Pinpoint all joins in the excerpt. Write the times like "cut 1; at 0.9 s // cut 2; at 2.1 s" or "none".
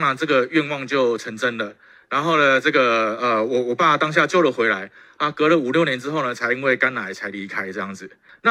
none